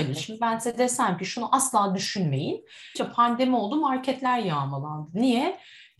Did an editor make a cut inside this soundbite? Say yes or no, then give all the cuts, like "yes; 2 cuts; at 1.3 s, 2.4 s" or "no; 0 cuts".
yes; 1 cut; at 3.0 s